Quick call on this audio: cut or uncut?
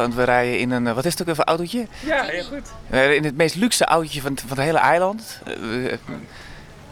uncut